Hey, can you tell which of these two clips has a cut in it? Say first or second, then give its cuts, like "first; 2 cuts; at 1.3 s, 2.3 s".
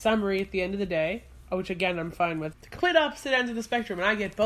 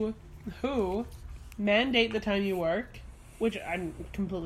first; 1 cut; at 2.5 s